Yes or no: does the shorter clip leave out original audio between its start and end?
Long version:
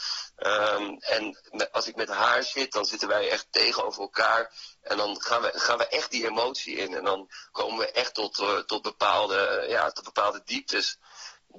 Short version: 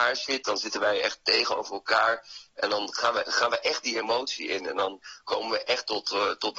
no